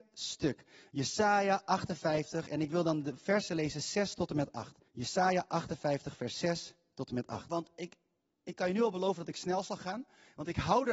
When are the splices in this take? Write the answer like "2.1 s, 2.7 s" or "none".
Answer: 4.9 s, 7.5 s